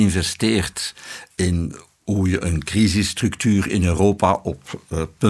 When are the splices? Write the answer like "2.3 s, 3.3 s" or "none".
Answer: none